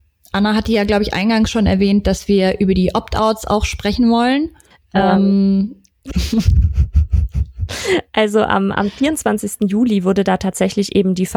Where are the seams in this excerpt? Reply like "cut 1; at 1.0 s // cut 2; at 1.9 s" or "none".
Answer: none